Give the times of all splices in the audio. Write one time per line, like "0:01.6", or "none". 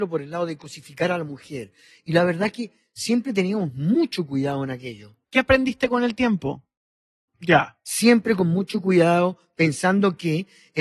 0:05.2
0:07.3

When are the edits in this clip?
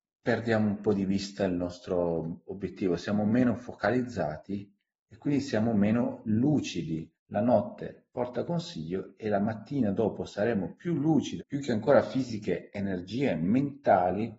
0:07.1
0:11.4

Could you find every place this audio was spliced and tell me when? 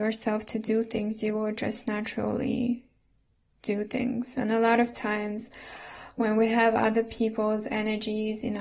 none

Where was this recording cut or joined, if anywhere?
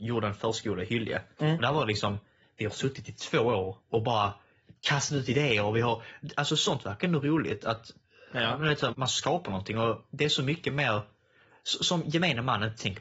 0:08.9

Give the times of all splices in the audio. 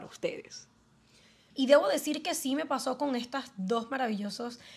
0:01.5

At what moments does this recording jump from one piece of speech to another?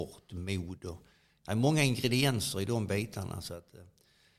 none

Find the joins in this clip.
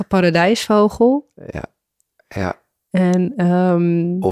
none

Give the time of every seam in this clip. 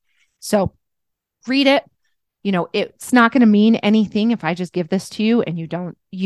0:02.4

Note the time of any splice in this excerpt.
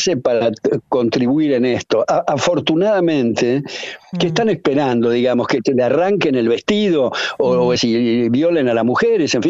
0:04.1
0:07.8

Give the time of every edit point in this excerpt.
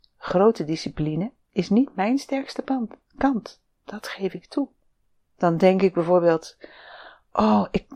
0:05.2

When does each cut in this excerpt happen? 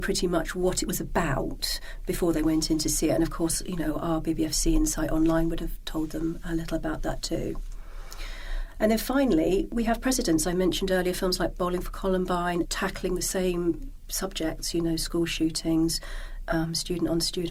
0:12.6

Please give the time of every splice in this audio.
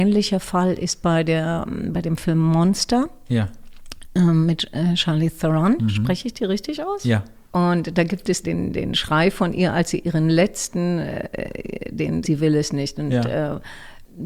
0:08.4
0:12.2

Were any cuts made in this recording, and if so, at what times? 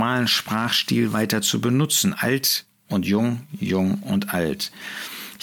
0:02.1

